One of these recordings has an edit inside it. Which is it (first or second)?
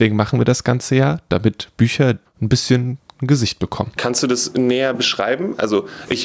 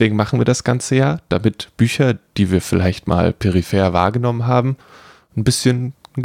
first